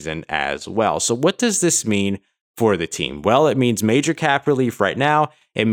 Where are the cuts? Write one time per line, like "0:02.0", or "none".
none